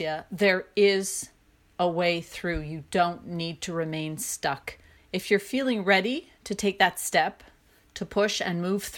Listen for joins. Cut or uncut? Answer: uncut